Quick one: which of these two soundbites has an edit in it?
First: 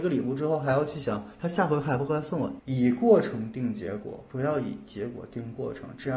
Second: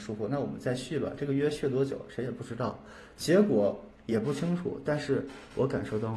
first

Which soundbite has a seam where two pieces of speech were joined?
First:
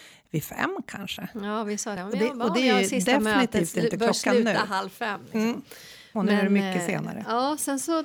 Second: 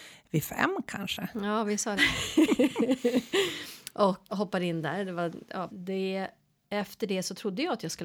second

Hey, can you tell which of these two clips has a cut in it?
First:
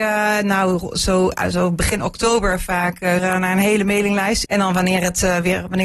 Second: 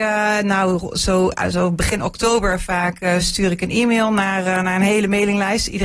first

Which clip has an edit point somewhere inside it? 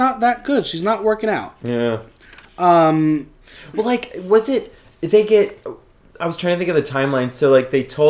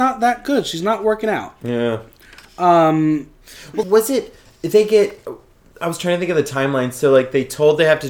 second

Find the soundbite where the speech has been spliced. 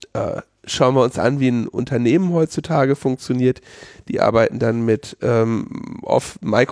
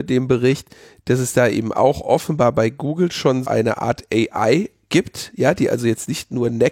second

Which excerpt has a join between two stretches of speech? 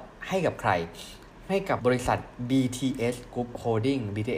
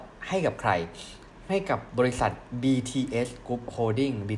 first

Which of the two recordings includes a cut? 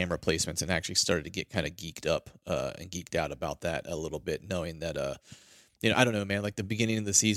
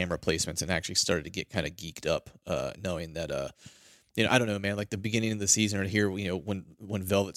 second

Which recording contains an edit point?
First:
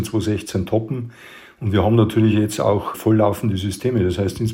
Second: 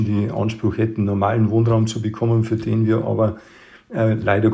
first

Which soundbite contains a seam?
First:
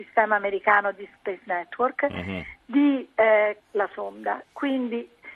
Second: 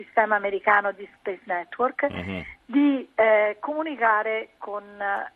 first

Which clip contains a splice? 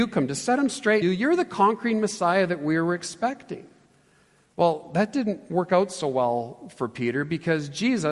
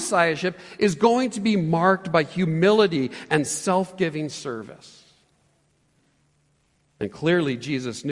first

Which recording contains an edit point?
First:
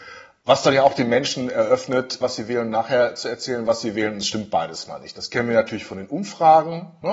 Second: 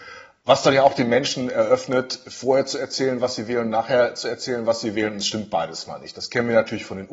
first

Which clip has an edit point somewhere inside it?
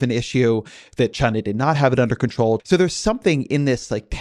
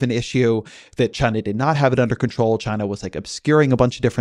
first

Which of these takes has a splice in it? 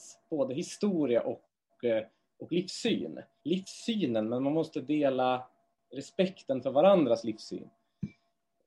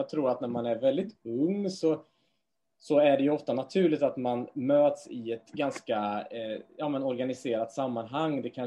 first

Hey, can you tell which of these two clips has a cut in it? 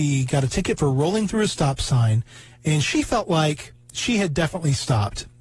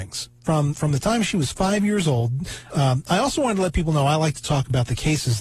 second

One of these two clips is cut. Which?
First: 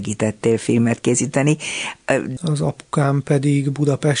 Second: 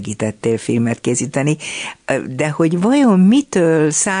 first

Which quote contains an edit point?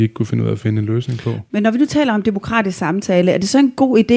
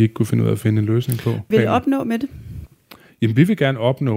second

